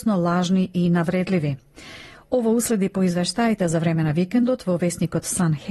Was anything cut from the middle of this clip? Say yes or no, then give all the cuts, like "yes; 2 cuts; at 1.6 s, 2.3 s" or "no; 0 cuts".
no; 0 cuts